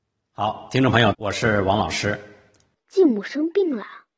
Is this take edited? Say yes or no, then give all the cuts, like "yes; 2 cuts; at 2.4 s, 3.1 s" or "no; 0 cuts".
yes; 2 cuts; at 1.1 s, 2.7 s